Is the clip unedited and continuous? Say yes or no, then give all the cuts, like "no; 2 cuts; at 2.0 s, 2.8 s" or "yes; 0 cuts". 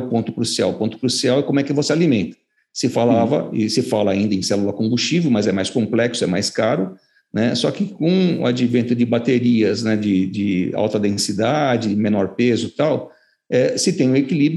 yes; 0 cuts